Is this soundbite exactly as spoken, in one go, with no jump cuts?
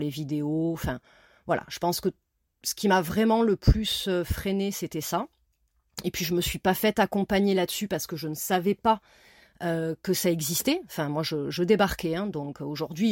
yes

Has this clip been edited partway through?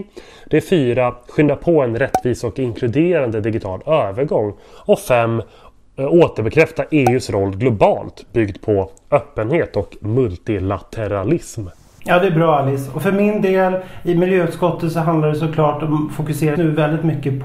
yes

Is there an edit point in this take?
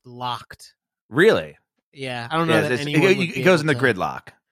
no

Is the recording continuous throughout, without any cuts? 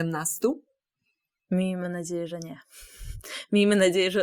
yes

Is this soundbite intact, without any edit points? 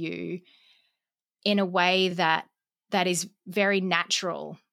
yes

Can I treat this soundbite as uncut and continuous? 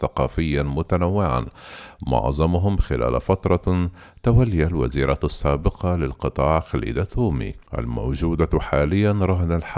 no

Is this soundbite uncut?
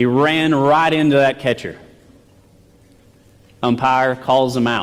yes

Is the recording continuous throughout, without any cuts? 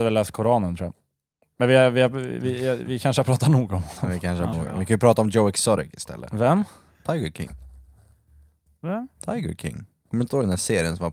no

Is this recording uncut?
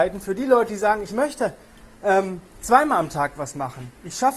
yes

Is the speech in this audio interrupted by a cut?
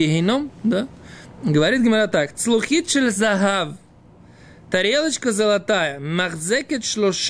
yes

